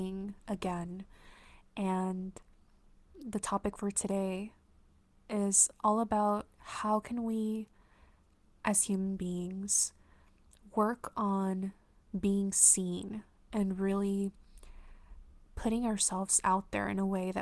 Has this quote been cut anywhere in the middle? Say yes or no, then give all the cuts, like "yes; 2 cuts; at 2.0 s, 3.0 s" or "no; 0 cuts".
no; 0 cuts